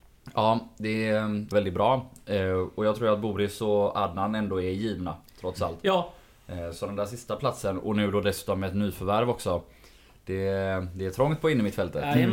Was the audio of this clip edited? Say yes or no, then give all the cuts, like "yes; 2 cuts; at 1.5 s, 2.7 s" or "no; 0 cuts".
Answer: yes; 1 cut; at 1.5 s